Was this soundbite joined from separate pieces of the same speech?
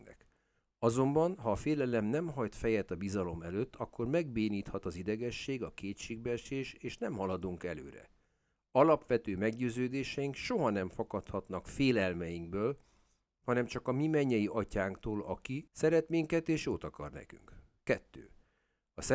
yes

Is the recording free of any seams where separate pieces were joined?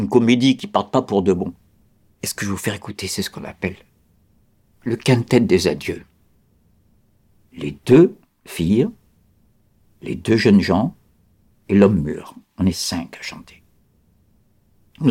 no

